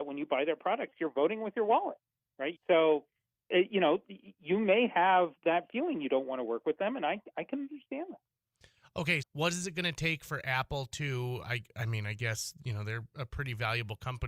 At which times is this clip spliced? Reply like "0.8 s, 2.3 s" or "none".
2.5 s, 9.2 s